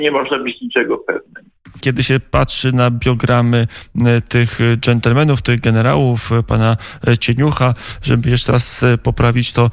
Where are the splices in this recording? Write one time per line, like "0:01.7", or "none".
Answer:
0:01.8